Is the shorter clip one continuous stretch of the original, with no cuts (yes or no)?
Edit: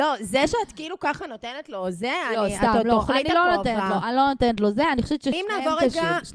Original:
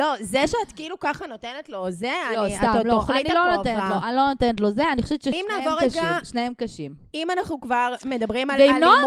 yes